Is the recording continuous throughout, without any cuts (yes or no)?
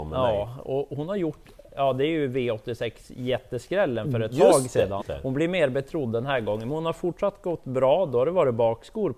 no